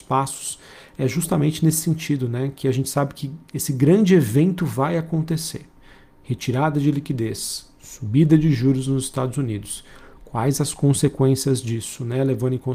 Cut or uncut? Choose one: uncut